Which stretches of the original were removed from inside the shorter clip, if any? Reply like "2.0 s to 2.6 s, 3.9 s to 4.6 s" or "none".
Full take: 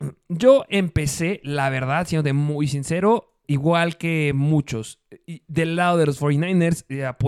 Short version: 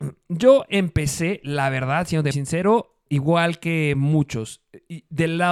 2.3 s to 2.7 s